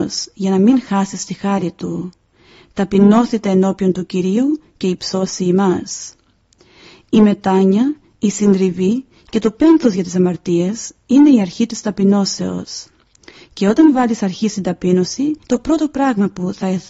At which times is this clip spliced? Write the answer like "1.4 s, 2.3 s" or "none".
15.4 s